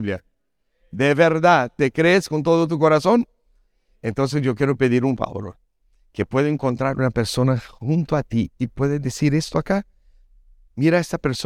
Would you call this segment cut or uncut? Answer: uncut